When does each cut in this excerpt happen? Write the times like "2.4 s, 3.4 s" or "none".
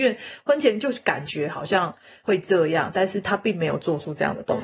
2.2 s